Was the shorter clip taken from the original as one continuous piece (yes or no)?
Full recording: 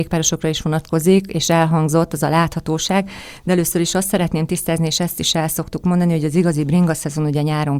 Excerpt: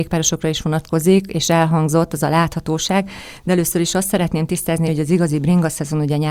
no